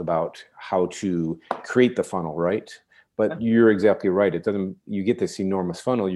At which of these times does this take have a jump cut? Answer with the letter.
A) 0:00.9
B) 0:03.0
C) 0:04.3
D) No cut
D